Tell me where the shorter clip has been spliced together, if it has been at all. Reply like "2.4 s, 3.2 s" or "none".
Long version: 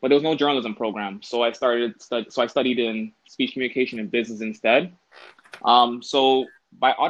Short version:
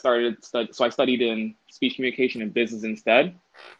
none